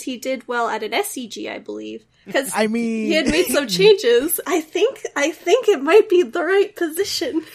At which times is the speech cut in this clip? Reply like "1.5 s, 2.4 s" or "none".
2.2 s, 4.4 s

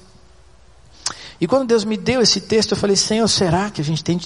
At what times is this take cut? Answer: none

